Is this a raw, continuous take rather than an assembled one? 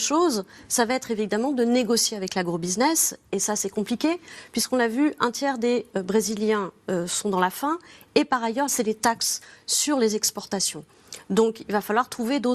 no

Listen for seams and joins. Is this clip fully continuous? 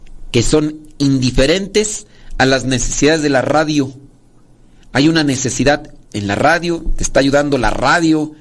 yes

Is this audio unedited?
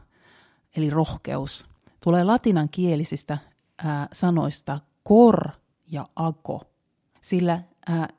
no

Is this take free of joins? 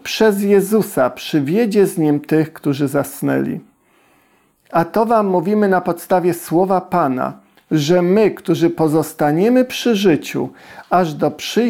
yes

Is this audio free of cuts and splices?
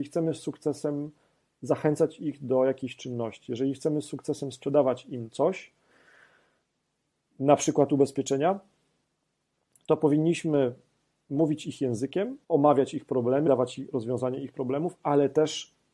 no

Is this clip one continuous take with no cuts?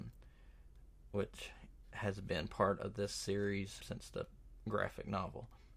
no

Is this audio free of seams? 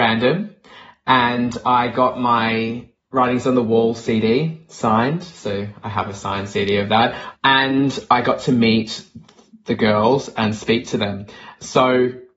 yes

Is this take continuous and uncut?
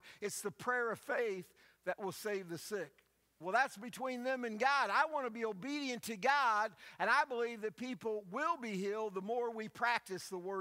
no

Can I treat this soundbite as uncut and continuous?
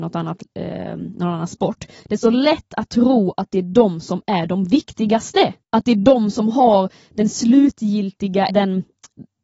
no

